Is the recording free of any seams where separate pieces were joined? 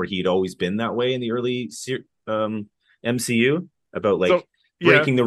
yes; 0 cuts

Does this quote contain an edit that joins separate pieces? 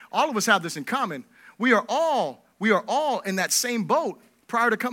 no; 0 cuts

